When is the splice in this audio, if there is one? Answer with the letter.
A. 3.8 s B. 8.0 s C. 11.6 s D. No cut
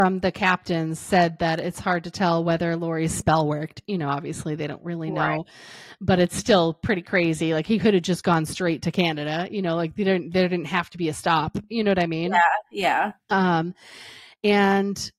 D